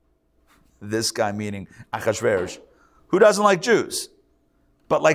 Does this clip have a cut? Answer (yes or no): no